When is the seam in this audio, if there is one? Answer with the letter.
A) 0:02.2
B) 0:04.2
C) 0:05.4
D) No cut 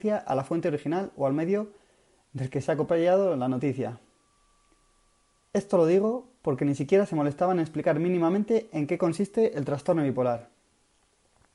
C